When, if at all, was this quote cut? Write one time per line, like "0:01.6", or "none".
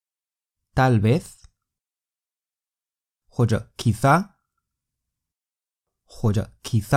none